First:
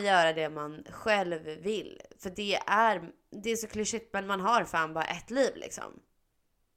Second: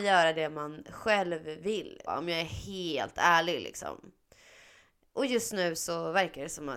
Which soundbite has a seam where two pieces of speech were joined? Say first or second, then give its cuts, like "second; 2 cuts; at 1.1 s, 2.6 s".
second; 1 cut; at 2.1 s